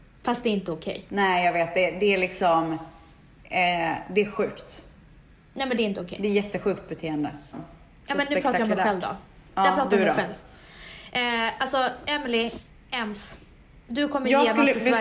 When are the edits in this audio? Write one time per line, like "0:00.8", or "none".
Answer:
0:07.5